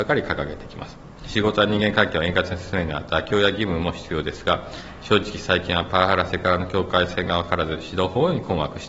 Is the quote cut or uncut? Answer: uncut